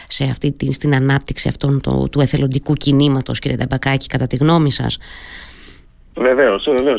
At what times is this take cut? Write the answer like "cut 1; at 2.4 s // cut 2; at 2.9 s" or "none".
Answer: none